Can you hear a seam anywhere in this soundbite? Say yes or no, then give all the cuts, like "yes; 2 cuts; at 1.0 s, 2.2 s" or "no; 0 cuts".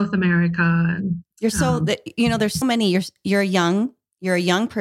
yes; 2 cuts; at 1.3 s, 2.6 s